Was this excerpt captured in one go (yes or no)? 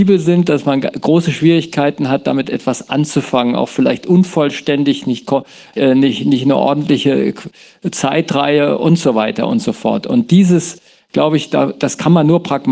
no